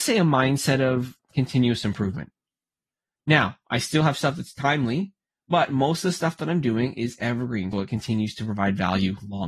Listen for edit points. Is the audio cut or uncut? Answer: cut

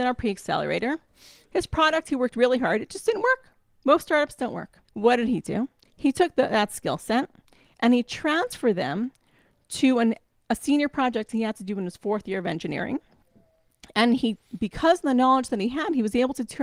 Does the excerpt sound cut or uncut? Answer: cut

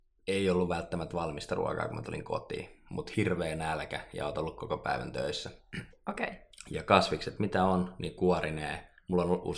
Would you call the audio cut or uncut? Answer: cut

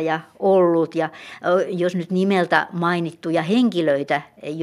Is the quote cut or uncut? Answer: uncut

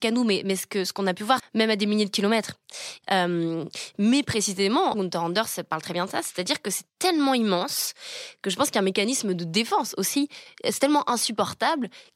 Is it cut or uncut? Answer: cut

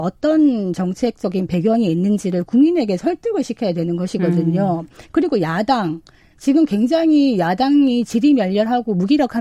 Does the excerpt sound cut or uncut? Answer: uncut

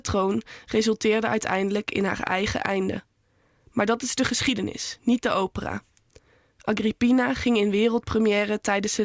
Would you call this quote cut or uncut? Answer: uncut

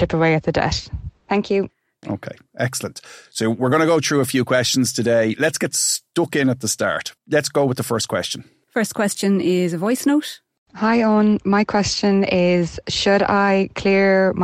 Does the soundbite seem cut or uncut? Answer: cut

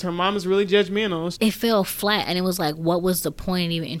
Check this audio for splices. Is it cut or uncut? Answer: cut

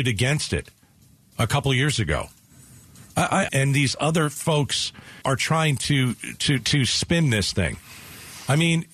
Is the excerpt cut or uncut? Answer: cut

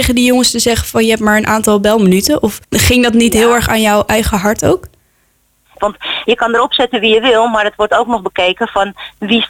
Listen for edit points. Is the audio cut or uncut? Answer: cut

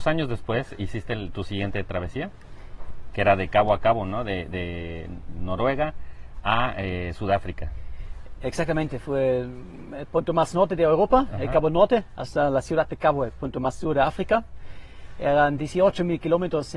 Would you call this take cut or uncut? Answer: uncut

